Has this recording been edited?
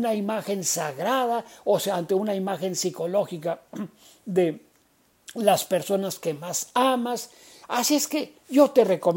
yes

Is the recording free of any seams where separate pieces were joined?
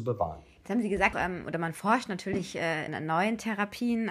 no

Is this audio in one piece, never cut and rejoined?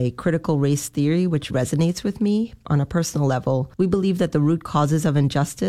no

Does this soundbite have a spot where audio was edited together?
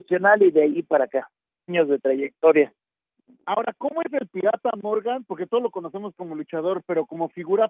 yes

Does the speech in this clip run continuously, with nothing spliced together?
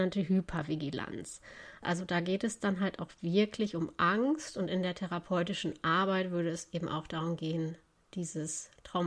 no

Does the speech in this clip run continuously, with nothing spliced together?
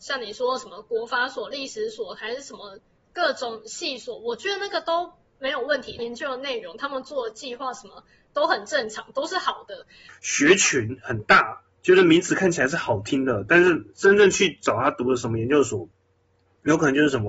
no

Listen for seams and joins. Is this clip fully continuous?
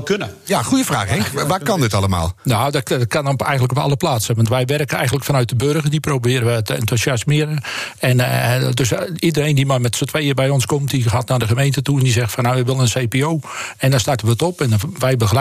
yes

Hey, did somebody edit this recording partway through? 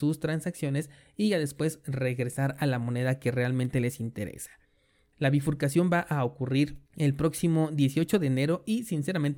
yes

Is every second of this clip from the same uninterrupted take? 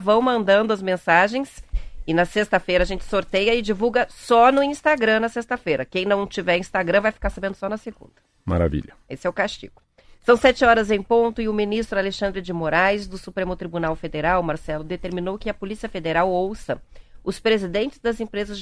yes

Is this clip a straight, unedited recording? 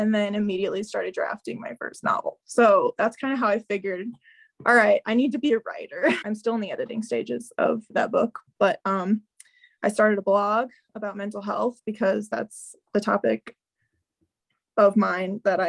no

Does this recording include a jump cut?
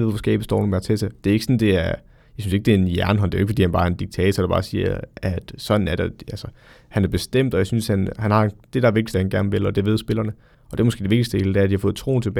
yes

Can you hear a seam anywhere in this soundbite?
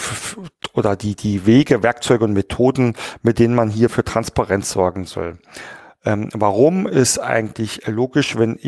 no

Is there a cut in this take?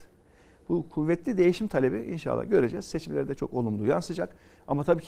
yes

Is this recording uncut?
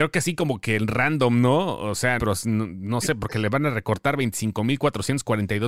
no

